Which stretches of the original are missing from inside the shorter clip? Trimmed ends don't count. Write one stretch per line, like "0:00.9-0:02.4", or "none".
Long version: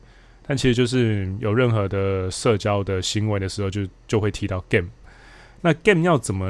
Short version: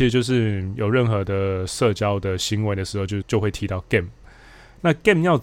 0:03.9-0:04.0